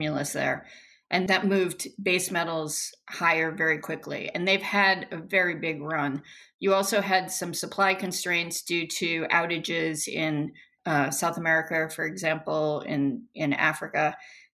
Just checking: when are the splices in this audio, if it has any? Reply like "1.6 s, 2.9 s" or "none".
none